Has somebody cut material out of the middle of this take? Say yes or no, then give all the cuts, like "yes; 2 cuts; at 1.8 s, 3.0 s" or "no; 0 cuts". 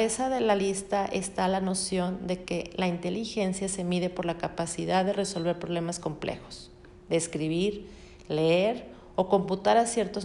no; 0 cuts